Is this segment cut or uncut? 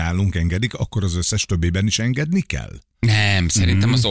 uncut